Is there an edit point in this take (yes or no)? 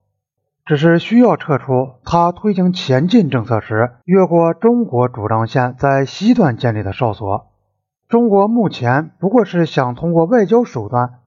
yes